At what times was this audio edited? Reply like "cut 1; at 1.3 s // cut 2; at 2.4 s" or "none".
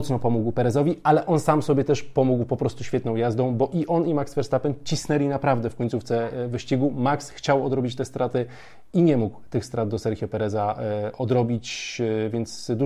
none